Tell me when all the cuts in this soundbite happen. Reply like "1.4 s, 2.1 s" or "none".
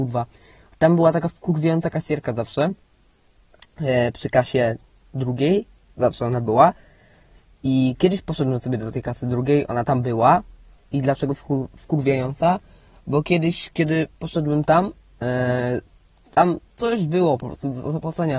none

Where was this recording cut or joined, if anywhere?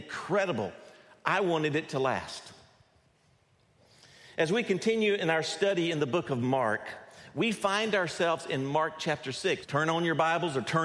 9.6 s

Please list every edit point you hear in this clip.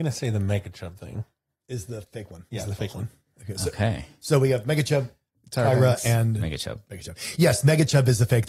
none

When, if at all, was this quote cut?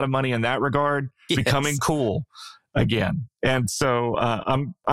1.3 s

